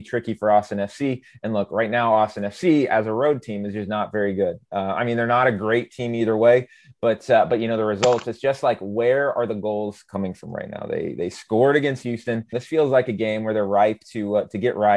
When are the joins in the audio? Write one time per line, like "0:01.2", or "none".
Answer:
0:12.5